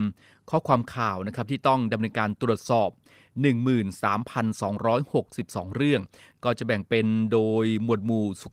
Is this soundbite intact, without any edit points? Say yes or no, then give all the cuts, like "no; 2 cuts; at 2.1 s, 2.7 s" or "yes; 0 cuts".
yes; 0 cuts